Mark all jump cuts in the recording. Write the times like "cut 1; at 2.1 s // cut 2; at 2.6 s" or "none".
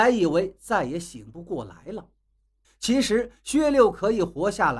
cut 1; at 2.6 s